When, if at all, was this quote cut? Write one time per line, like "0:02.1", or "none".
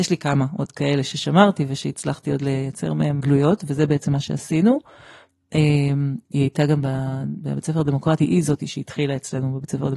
0:03.2